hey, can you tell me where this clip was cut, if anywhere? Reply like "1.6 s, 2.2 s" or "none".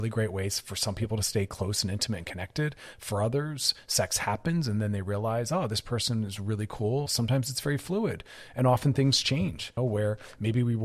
7.1 s, 9.8 s